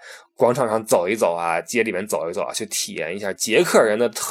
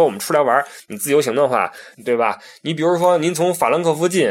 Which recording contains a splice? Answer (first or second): second